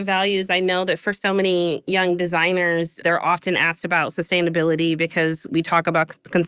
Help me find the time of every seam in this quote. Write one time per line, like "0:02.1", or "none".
0:03.0
0:05.5